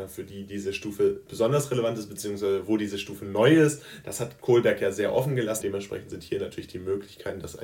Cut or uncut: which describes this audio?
cut